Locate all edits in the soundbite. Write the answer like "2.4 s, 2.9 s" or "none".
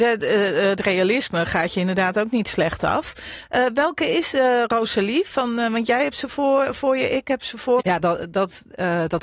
7.8 s